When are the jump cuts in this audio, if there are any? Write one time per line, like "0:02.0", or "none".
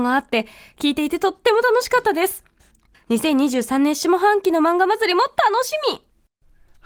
0:02.9